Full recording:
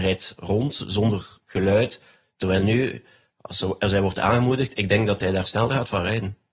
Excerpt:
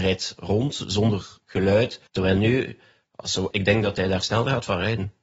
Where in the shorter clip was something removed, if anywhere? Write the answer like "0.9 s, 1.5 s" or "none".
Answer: 2.1 s, 3.5 s